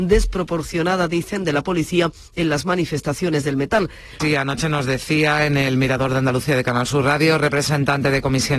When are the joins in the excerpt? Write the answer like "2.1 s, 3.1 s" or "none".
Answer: 4.2 s

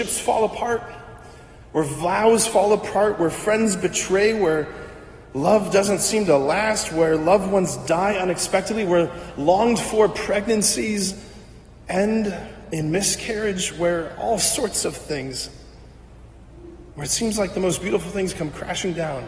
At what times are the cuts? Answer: 16.9 s

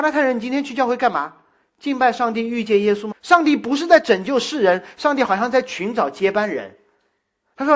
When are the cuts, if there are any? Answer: 3.1 s

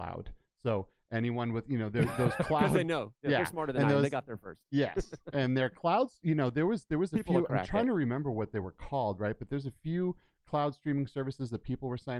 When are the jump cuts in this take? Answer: none

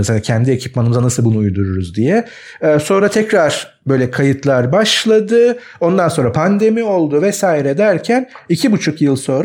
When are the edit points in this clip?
none

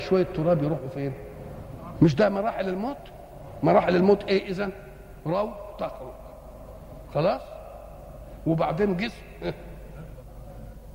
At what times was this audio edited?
1.9 s

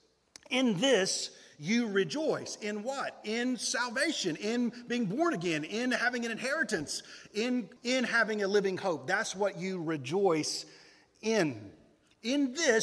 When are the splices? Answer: 7.8 s

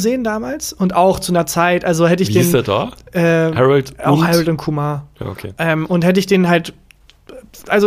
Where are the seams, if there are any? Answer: none

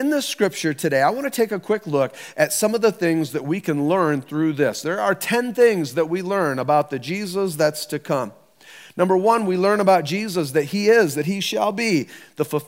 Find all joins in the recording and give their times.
none

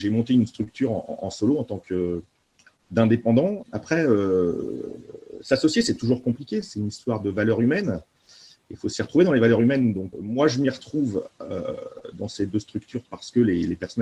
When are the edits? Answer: 3.6 s, 10.1 s

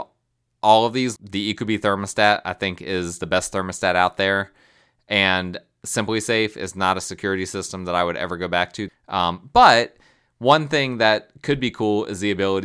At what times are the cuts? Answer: 1.2 s, 8.9 s

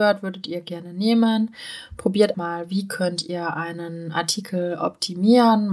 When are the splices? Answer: 2.3 s

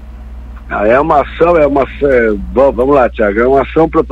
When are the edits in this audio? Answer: 2.7 s

